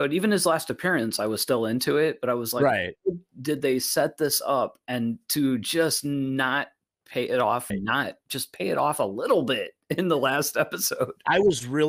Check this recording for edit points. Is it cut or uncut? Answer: cut